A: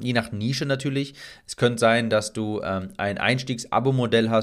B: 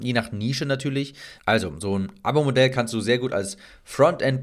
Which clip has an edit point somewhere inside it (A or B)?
B